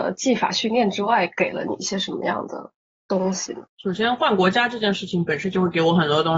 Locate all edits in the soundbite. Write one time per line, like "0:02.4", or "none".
0:03.7